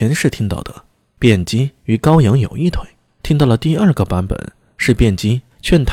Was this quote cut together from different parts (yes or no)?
yes